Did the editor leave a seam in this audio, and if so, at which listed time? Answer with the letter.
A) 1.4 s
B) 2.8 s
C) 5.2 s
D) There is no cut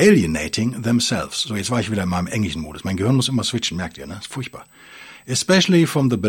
D